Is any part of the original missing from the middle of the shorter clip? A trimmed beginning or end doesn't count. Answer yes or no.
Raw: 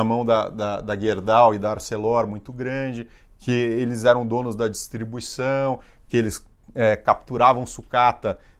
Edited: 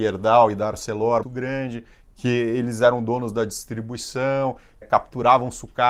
yes